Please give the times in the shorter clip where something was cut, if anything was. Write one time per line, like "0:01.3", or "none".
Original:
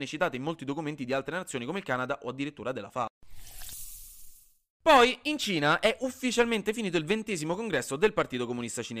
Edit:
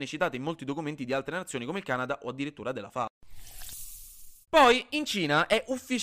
0:04.4